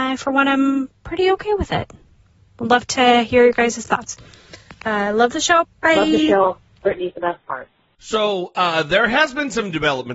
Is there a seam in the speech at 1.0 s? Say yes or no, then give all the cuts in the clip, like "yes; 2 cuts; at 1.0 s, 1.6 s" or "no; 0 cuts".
no; 2 cuts; at 5.6 s, 8.0 s